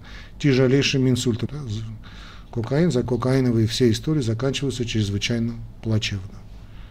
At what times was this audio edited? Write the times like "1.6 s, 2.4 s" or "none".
1.5 s, 3.0 s